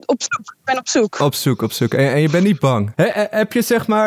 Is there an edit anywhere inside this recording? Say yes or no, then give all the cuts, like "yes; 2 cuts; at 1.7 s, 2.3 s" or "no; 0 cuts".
yes; 1 cut; at 2.9 s